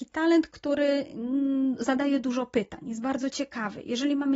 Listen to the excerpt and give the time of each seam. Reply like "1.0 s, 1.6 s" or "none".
none